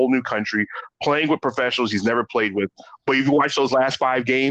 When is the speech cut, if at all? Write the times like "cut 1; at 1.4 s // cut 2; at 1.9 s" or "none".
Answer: none

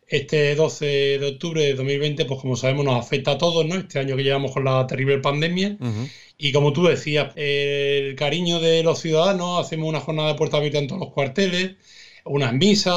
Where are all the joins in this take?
cut 1; at 7.3 s

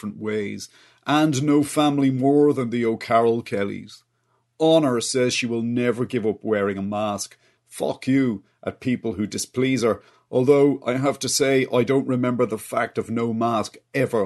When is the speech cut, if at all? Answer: cut 1; at 7.6 s

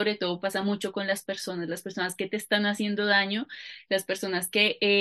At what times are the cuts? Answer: none

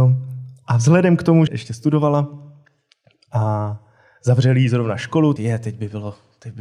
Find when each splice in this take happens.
cut 1; at 1.5 s // cut 2; at 5.4 s

